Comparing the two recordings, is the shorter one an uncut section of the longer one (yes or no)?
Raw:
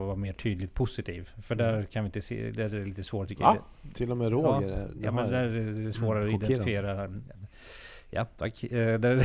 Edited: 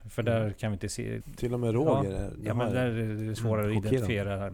no